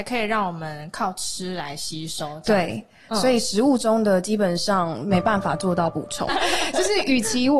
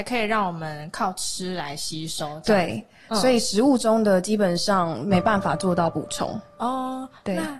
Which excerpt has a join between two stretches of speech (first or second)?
first